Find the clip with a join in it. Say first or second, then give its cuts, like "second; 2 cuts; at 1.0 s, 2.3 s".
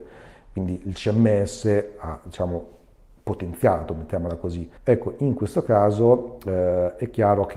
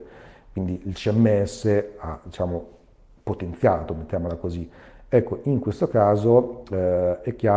first; 1 cut; at 4.8 s